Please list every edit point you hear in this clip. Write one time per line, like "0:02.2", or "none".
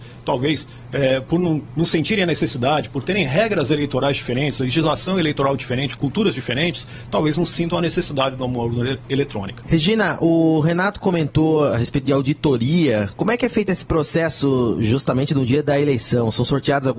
none